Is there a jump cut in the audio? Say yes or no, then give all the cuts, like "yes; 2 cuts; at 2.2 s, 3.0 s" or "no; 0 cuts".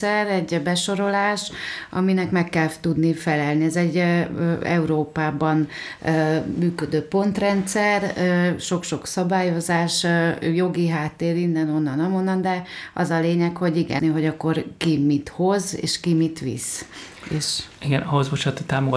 yes; 1 cut; at 14.0 s